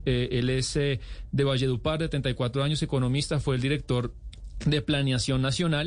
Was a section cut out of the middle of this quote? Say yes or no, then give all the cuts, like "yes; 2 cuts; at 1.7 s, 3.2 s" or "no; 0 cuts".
no; 0 cuts